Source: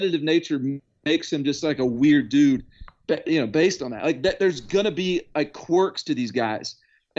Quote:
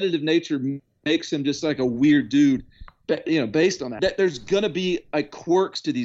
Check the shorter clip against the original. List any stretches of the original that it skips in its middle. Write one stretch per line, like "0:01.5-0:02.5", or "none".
0:04.0-0:04.2